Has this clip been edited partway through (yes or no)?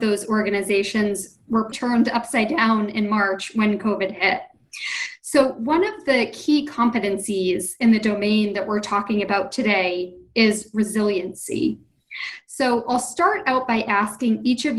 yes